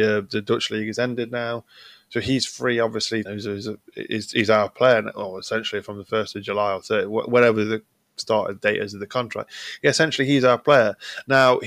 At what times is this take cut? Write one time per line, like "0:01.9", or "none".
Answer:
0:03.2